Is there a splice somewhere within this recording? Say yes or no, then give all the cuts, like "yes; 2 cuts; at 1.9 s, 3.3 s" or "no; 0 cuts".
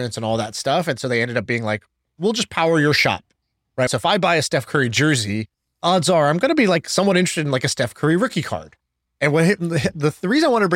yes; 1 cut; at 3.9 s